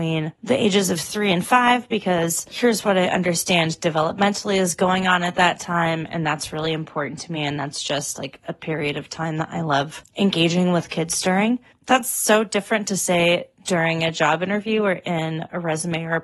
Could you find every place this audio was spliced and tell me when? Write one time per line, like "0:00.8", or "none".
none